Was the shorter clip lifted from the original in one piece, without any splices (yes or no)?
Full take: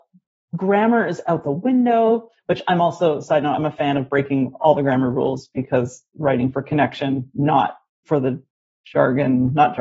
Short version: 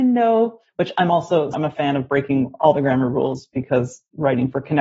no